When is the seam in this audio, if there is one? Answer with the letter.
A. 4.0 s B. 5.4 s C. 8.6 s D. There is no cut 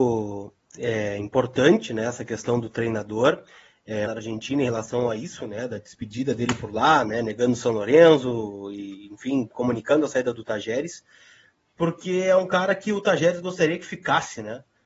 A